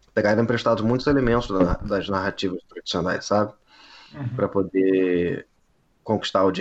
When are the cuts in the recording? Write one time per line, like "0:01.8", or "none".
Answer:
none